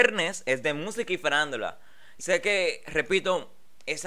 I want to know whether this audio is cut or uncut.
cut